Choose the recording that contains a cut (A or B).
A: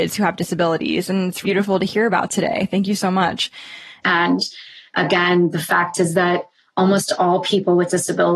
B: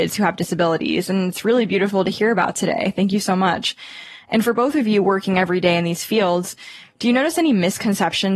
A